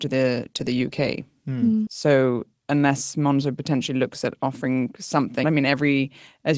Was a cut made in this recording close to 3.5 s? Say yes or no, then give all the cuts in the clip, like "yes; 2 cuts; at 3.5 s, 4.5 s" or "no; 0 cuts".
no; 2 cuts; at 1.9 s, 5.4 s